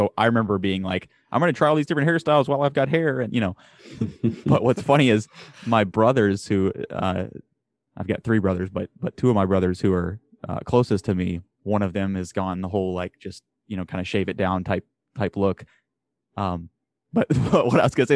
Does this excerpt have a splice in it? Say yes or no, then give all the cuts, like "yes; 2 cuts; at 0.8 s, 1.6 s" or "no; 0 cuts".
yes; 1 cut; at 11.5 s